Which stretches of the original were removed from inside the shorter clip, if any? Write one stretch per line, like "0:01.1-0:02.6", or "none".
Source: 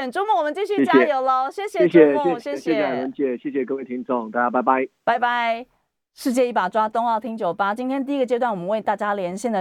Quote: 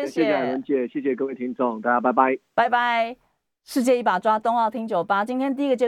none

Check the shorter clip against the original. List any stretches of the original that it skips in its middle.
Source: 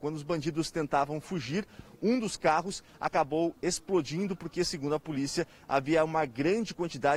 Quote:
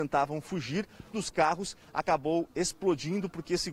0:01.9-0:02.2

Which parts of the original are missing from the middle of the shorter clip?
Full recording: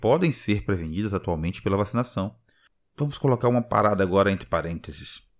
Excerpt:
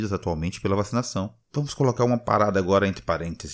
0:02.4-0:02.9

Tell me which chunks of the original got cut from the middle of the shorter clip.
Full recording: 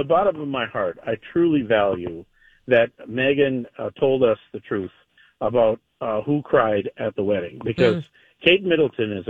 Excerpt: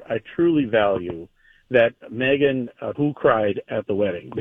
0:03.9-0:06.2

